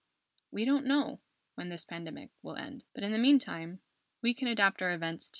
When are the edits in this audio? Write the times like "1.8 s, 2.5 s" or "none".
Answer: 2.9 s